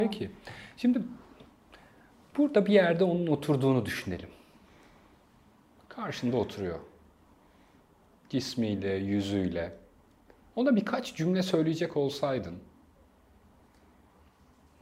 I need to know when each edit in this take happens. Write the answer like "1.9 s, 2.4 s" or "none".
none